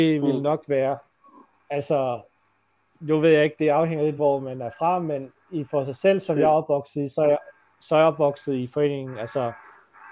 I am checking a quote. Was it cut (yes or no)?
no